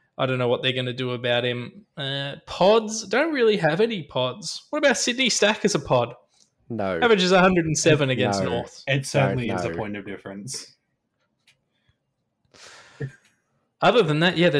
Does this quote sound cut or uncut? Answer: uncut